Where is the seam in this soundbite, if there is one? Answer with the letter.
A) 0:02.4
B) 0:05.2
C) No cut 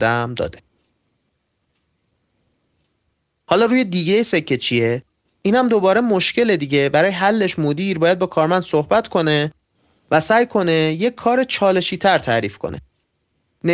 B